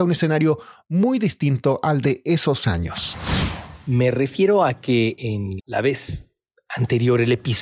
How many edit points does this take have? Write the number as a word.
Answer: one